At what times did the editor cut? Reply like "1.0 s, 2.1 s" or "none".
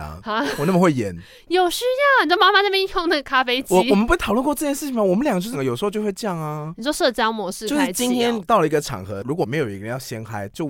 none